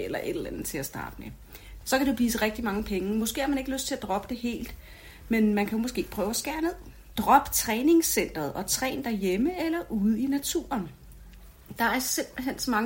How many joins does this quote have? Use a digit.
2